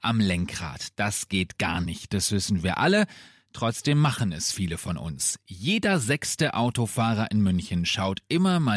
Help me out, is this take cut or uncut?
uncut